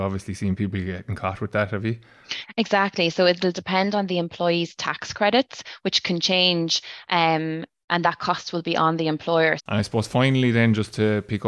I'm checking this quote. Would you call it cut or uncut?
cut